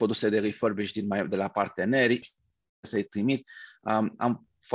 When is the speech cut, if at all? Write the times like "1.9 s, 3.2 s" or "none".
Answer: 2.2 s